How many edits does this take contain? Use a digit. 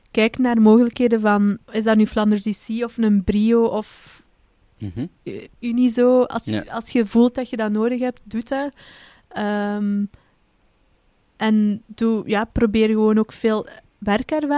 0